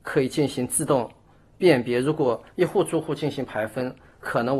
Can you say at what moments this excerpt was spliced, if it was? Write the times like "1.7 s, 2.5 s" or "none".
none